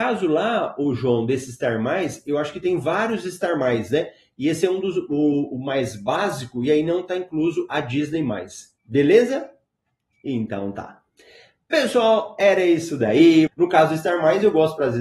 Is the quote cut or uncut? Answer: cut